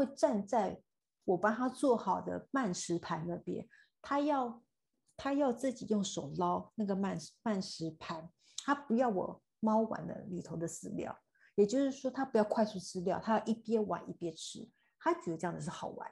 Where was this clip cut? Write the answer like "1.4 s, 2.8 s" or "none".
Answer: none